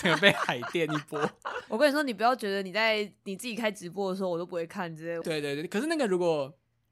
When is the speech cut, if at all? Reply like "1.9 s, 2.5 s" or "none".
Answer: 1.7 s, 5.2 s